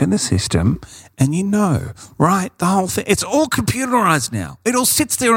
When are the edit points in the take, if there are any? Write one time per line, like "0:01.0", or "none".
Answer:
none